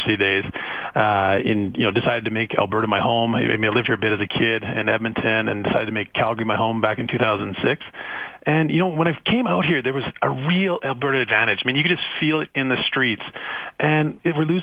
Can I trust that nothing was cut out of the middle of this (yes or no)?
yes